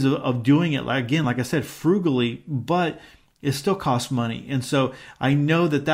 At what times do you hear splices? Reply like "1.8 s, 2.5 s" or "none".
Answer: none